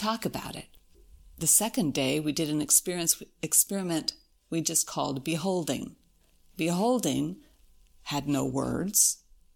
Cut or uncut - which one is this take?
uncut